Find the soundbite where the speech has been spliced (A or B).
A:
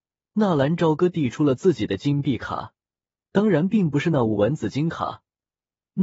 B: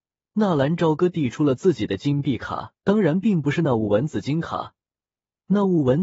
B